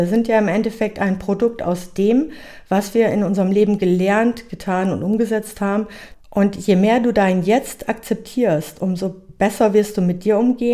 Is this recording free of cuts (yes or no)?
no